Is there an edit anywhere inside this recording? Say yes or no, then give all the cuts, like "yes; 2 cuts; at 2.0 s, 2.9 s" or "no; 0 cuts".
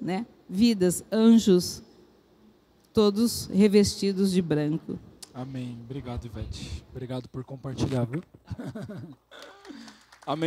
no; 0 cuts